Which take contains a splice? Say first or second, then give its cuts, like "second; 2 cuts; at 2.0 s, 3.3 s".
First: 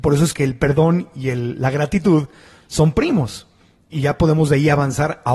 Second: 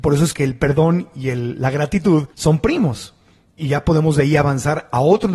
second; 1 cut; at 2.3 s